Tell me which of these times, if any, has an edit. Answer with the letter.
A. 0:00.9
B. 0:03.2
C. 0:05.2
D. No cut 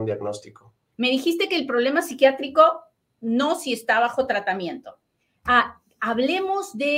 A